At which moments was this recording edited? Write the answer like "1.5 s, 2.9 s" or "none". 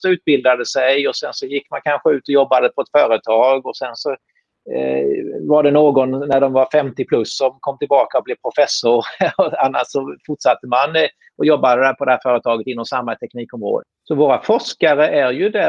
13.8 s